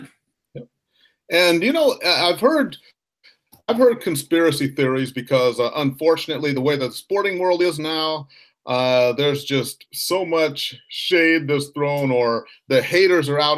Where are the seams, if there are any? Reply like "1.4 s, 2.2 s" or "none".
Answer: none